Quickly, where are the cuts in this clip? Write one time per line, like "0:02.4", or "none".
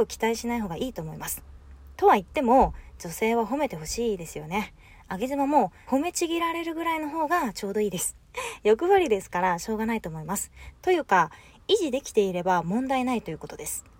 0:05.8
0:10.7